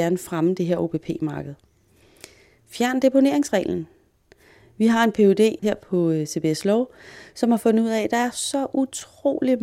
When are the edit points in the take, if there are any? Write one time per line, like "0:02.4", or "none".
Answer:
none